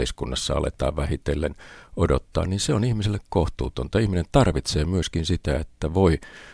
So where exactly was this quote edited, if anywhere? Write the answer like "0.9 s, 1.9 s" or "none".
none